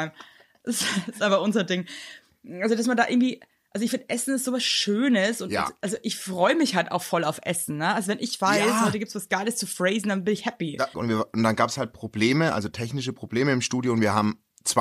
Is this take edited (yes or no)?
yes